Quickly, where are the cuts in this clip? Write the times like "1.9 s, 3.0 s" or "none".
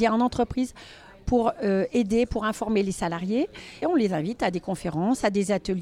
3.8 s